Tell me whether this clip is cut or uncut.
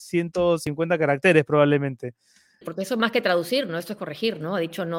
cut